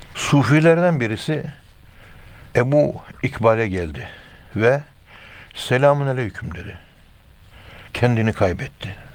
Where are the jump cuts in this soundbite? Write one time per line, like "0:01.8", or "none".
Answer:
0:07.9

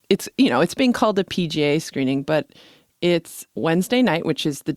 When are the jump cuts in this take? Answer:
0:03.5

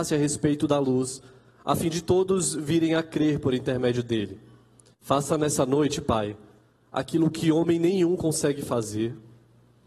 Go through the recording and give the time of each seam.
0:04.9

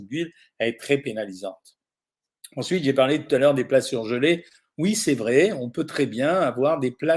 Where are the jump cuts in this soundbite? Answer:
none

